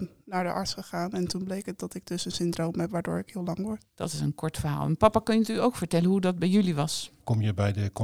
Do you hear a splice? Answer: no; 0 cuts

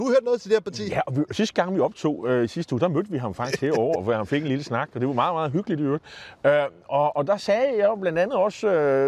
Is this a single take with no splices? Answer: no; 1 cut; at 4.0 s

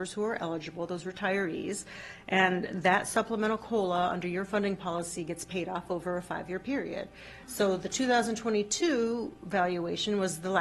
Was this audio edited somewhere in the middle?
no; 0 cuts

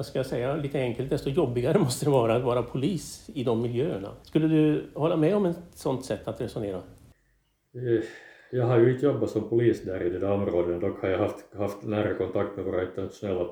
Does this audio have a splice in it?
yes; 1 cut; at 4.2 s

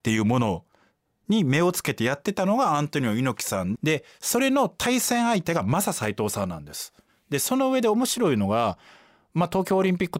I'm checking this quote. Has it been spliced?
yes; 1 cut; at 3.8 s

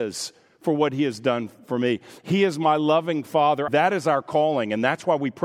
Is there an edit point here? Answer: yes; 1 cut; at 3.7 s

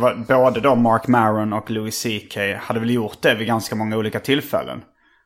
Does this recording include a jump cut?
no; 0 cuts

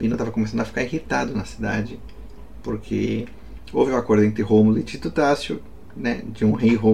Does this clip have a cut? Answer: no; 0 cuts

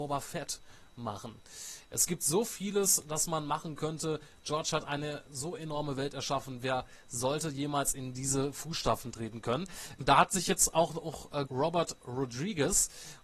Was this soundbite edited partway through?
yes; 2 cuts; at 9.9 s, 11.5 s

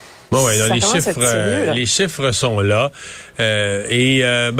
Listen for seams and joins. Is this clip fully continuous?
yes; 0 cuts

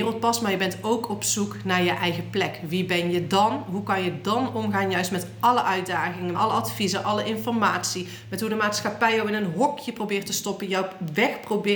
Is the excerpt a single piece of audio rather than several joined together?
no; 1 cut; at 6.3 s

